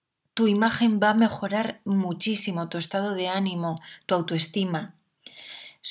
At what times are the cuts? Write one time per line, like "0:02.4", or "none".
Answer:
none